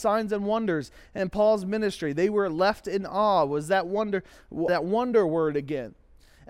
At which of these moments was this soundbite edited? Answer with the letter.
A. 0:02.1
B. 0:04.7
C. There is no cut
B